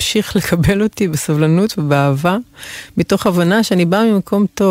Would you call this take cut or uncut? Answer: uncut